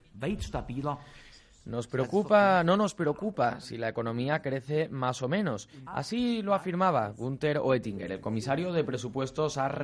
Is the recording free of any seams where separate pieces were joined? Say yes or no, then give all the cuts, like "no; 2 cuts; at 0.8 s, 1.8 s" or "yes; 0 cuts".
no; 1 cut; at 5.9 s